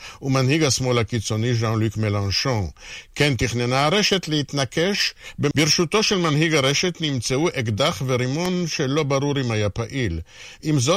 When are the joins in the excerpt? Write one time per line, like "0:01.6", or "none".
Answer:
0:05.5